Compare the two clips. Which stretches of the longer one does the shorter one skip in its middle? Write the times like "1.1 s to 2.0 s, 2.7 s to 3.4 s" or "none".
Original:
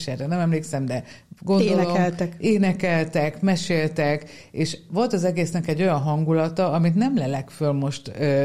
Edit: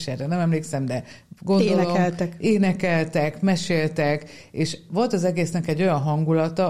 none